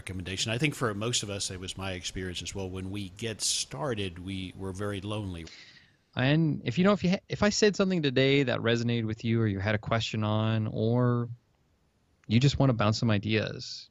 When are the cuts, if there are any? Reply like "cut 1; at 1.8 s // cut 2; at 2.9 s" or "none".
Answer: cut 1; at 5.4 s